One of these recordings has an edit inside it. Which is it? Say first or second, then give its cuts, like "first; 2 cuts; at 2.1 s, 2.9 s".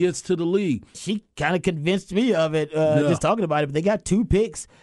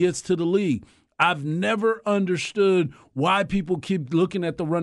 first; 1 cut; at 0.9 s